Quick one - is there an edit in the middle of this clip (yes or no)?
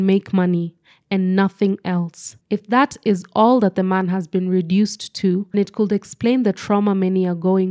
yes